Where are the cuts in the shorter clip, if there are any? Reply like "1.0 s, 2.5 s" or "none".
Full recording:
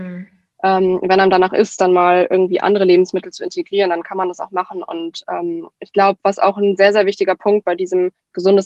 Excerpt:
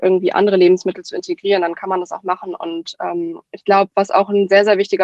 none